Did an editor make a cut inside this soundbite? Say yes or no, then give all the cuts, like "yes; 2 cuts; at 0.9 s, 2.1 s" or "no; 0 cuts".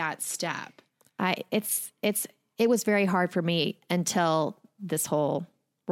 no; 0 cuts